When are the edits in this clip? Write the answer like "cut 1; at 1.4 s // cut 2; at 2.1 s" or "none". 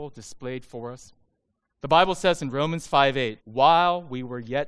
cut 1; at 1.8 s // cut 2; at 3.4 s